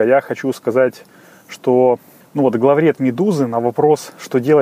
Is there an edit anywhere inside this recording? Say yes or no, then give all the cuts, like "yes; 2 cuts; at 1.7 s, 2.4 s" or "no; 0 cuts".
yes; 1 cut; at 2.2 s